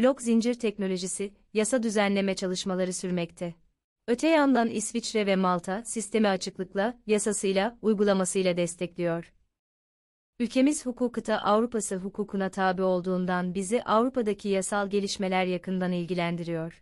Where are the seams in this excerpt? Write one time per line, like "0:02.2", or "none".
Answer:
0:04.0
0:10.3